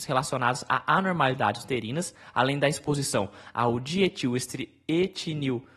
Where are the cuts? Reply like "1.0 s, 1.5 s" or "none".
none